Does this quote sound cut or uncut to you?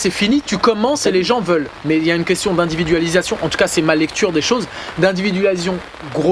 uncut